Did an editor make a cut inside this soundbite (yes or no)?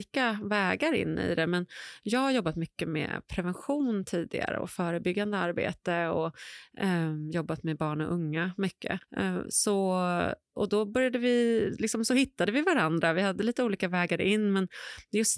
yes